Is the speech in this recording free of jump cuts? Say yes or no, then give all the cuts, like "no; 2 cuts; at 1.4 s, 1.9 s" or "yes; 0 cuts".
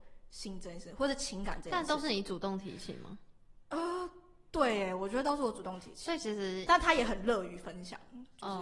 yes; 0 cuts